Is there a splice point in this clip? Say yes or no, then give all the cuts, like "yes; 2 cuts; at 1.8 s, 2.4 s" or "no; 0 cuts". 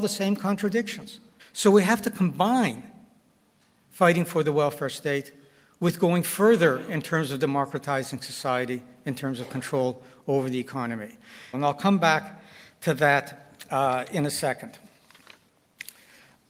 yes; 2 cuts; at 1.4 s, 11.5 s